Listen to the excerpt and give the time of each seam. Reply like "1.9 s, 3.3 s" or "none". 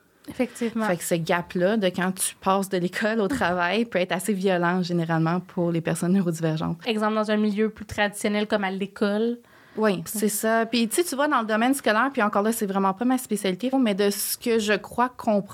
6.8 s, 10.1 s, 13.7 s

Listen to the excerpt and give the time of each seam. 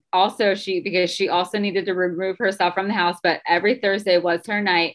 none

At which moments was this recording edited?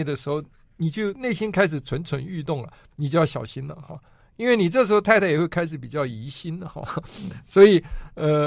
none

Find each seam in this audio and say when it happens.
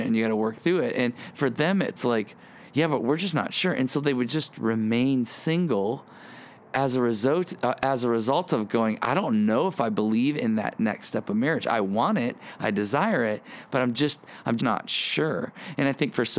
14.6 s

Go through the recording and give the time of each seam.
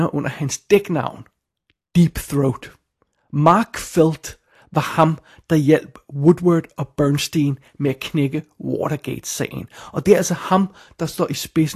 none

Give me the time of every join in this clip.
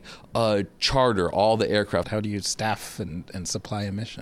2.0 s

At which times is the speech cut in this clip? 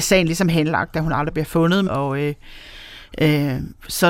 1.9 s

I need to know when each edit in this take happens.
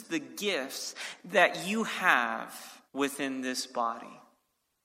2.9 s

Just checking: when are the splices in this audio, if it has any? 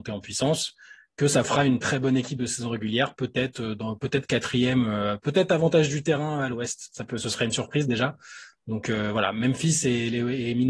1.8 s

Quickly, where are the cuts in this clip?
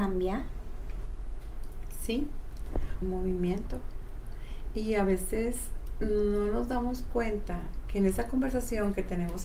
3.0 s

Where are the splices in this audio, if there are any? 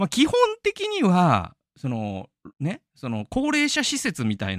2.5 s

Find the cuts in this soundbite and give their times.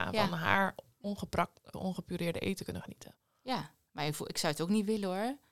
1.7 s

